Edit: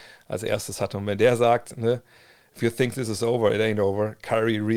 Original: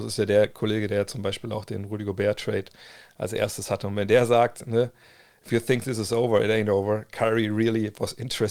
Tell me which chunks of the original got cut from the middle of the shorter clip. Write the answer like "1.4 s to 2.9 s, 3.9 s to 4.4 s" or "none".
none